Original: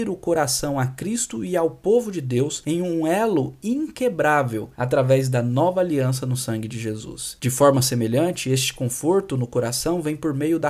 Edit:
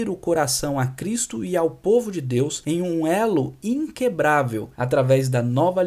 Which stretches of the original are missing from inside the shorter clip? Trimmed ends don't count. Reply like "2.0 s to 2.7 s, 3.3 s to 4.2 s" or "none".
none